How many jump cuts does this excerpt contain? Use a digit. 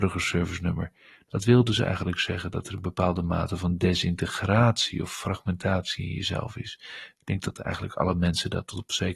1